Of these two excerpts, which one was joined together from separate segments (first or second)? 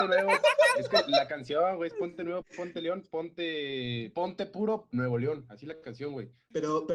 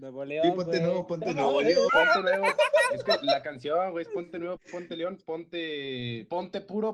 second